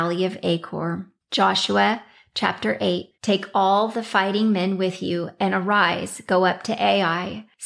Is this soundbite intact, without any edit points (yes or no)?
no